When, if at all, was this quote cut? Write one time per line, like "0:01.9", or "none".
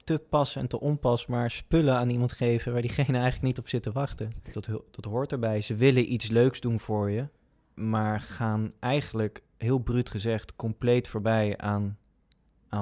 0:04.5